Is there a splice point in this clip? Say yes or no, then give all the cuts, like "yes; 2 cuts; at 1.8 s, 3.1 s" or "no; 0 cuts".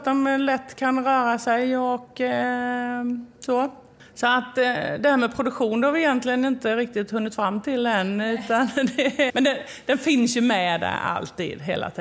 yes; 1 cut; at 9.3 s